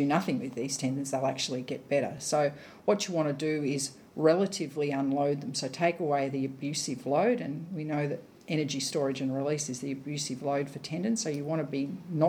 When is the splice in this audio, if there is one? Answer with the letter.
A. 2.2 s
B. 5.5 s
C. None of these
C